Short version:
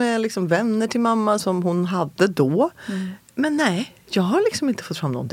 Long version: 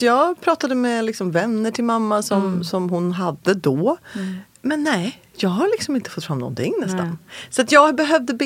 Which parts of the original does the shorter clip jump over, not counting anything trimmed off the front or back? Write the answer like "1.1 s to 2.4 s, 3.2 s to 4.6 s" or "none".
2.2 s to 2.7 s